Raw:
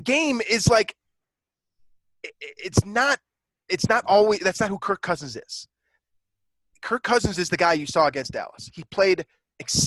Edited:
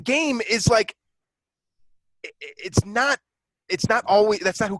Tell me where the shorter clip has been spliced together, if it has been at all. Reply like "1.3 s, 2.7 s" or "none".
none